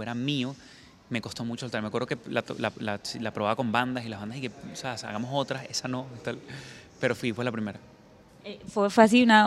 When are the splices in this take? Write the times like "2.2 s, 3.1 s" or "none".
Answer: none